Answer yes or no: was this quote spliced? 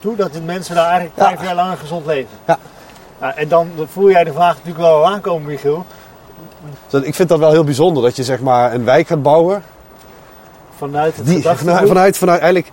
yes